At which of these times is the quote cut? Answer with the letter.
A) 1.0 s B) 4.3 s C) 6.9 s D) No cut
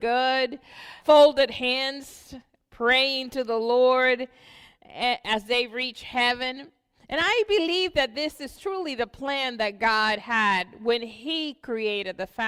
A